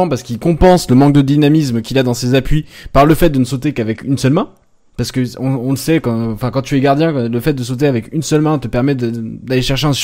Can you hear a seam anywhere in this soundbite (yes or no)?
no